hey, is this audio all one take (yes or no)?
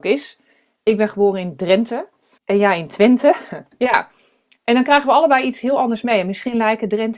no